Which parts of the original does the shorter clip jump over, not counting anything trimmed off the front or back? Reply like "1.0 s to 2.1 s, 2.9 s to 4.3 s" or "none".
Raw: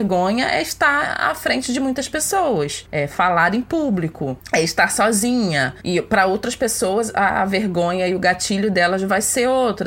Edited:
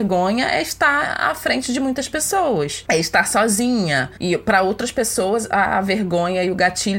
2.9 s to 4.5 s